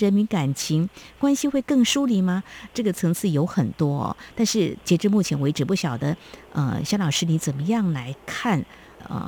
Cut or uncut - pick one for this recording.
uncut